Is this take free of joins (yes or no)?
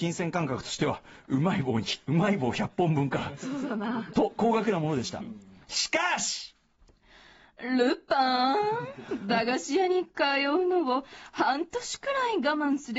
yes